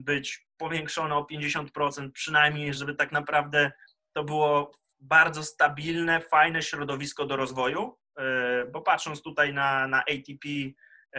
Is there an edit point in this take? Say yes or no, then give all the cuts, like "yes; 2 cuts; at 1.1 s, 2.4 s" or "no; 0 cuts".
yes; 2 cuts; at 2.8 s, 4.9 s